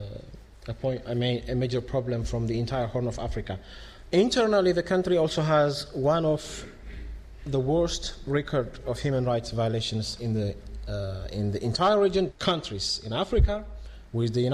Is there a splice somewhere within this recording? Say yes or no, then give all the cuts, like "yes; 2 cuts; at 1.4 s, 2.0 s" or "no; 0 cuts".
yes; 2 cuts; at 4.1 s, 12.3 s